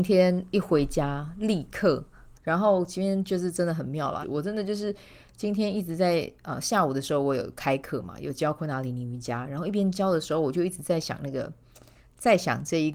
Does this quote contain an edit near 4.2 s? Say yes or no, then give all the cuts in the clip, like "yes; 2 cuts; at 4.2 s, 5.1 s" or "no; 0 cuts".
yes; 2 cuts; at 2.3 s, 4.2 s